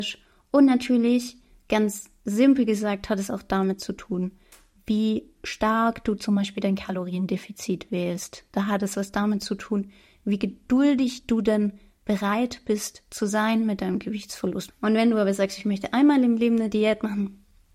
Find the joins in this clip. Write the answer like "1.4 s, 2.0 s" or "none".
14.7 s